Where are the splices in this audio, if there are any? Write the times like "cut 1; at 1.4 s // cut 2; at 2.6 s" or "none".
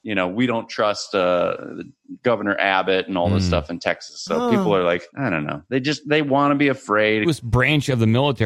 cut 1; at 5.1 s // cut 2; at 7.2 s